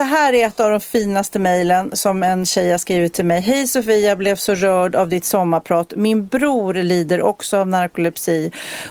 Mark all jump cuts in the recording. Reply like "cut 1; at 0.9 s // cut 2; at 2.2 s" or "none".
none